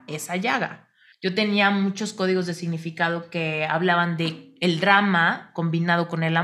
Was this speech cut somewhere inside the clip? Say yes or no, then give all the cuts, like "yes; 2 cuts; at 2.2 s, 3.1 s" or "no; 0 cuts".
yes; 1 cut; at 1.1 s